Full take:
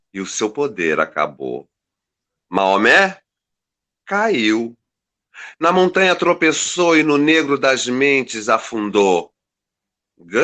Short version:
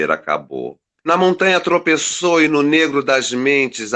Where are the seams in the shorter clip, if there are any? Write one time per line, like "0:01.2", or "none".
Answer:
0:01.0